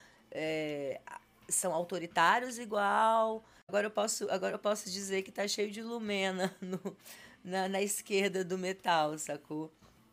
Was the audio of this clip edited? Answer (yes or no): no